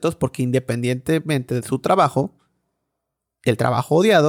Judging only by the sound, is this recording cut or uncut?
uncut